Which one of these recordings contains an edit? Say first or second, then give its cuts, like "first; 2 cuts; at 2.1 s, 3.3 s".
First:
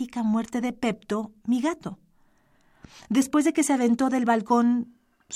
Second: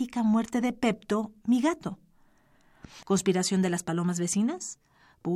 second; 1 cut; at 3.0 s